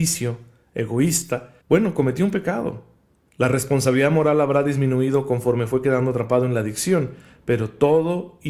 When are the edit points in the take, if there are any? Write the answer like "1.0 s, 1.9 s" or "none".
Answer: 1.6 s, 3.3 s